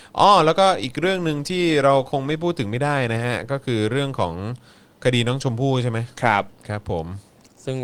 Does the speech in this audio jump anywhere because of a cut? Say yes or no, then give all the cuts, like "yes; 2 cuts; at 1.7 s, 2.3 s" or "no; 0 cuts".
no; 0 cuts